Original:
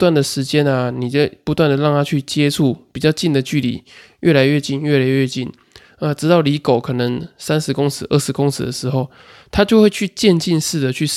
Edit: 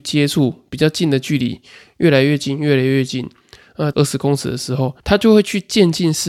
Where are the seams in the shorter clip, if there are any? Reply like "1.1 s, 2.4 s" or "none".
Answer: 3.9 s, 5.0 s